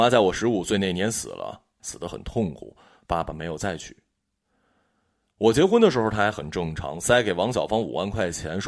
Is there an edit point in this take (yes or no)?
yes